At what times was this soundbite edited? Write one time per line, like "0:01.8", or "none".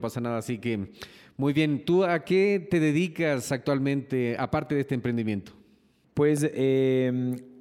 none